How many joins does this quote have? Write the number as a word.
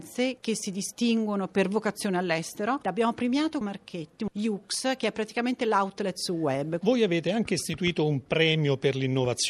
one